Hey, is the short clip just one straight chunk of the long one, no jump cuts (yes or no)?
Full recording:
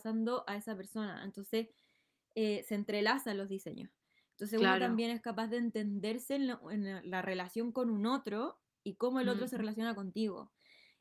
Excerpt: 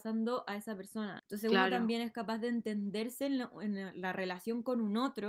no